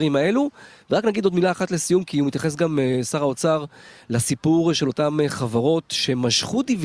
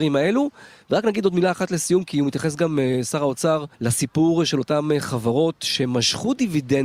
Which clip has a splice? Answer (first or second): second